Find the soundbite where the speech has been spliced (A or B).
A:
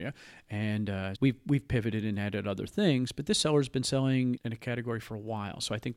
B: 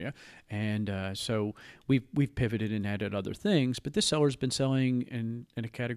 A